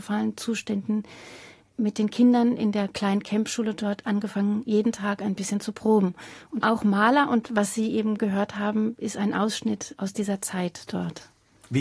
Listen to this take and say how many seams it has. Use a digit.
1